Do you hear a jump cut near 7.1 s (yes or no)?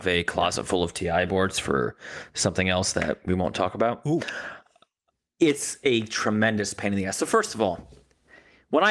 no